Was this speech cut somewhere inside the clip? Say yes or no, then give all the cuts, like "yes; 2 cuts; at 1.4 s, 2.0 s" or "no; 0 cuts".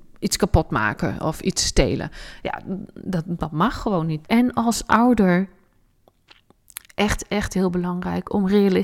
yes; 2 cuts; at 4.2 s, 6.8 s